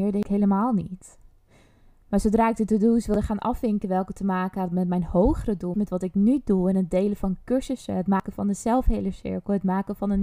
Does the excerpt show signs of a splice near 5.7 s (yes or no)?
yes